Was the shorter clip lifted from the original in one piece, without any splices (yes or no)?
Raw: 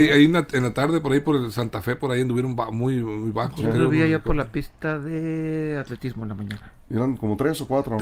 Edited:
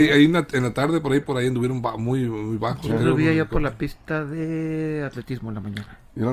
no